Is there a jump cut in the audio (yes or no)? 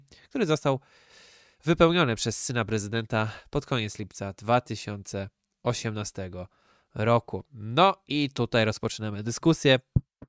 no